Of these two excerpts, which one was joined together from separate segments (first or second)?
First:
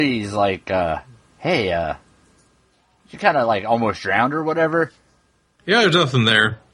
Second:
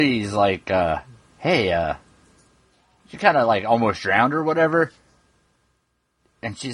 first